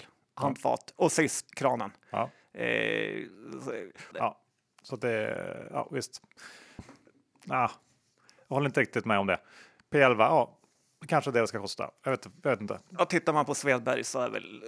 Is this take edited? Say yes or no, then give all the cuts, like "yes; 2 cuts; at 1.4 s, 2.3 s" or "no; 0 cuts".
yes; 3 cuts; at 1.5 s, 4.1 s, 6.8 s